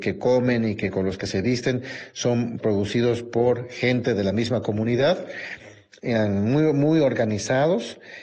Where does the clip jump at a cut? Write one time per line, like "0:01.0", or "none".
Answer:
none